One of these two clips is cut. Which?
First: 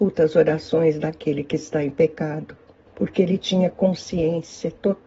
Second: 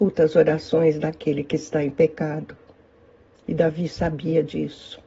first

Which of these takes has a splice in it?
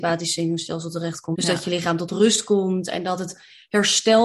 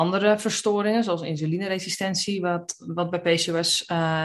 first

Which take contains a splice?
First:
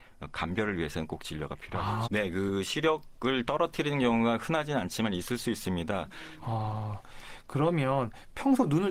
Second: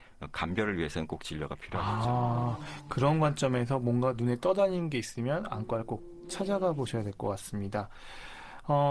first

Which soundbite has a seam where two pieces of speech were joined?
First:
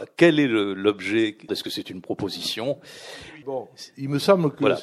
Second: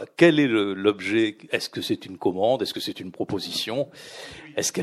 first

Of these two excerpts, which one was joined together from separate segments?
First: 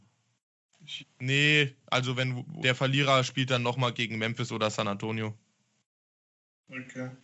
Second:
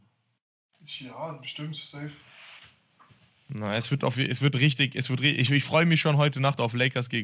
first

